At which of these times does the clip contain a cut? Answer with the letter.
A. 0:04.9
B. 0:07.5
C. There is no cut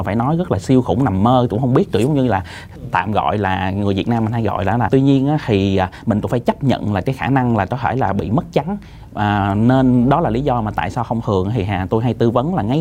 A